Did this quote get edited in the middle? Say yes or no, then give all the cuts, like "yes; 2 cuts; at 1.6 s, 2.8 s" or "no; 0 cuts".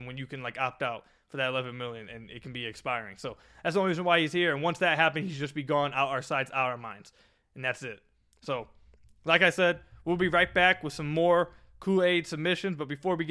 no; 0 cuts